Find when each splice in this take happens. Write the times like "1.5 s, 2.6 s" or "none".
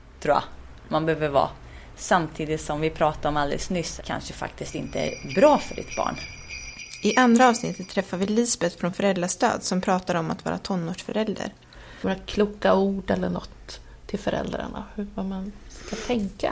4.0 s